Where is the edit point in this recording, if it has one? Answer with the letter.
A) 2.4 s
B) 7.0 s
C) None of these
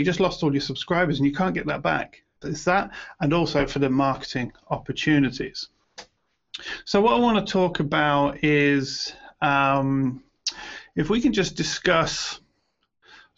A